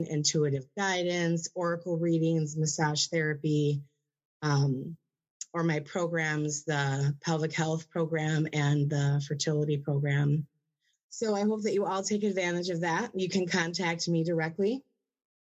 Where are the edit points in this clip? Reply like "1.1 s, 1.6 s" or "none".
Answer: 10.9 s